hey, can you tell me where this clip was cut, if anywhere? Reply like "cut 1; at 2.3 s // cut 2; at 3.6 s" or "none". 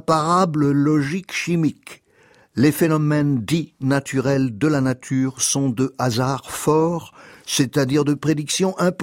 none